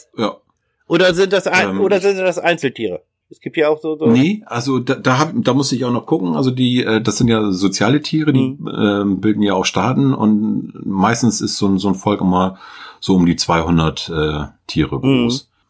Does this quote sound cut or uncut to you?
uncut